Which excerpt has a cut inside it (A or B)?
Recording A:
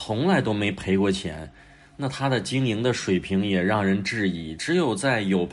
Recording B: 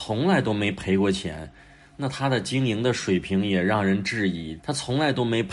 B